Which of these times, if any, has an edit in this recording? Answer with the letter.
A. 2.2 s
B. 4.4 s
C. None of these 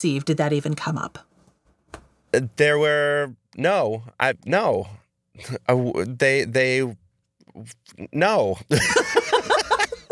B